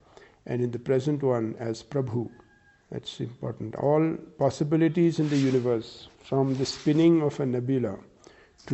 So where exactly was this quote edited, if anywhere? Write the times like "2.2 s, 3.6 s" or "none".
2.8 s